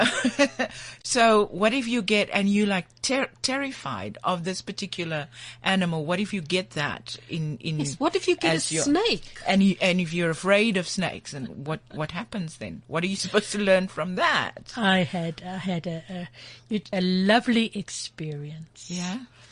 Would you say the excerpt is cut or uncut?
cut